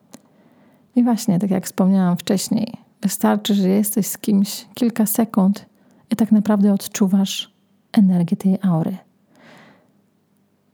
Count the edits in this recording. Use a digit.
0